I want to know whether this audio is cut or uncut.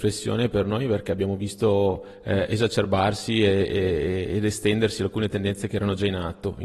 uncut